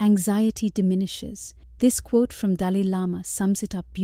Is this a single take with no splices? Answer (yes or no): no